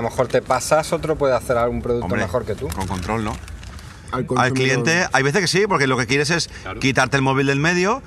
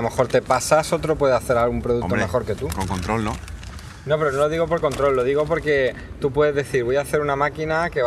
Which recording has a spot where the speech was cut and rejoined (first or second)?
first